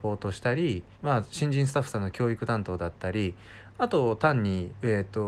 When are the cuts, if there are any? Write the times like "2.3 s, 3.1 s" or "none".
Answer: 0.9 s